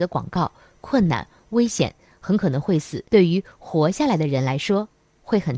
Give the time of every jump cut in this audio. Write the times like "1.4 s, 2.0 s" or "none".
3.1 s